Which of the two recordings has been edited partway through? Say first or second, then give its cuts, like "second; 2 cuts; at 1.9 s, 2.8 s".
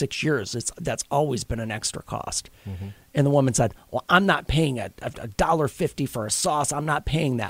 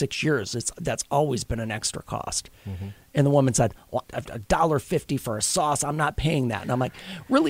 second; 1 cut; at 4.0 s